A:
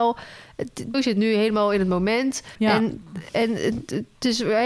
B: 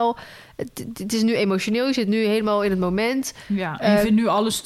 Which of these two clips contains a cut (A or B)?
A